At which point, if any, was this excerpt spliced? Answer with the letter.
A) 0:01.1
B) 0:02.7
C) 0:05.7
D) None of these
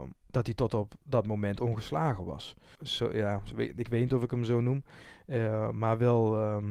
B